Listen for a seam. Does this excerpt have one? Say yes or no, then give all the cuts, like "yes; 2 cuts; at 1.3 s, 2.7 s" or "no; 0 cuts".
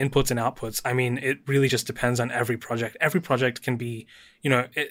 no; 0 cuts